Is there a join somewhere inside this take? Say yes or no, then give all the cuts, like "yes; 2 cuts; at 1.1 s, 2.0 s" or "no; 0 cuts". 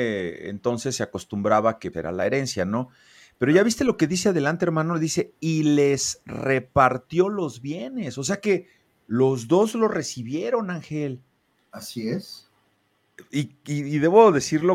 yes; 1 cut; at 1.9 s